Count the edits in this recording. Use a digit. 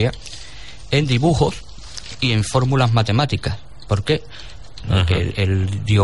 1